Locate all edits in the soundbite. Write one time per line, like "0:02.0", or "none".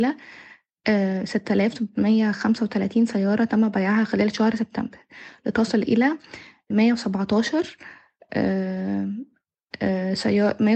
0:06.7